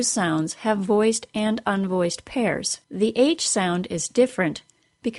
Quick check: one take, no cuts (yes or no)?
no